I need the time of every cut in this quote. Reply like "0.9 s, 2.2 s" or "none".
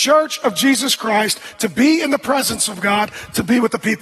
1.5 s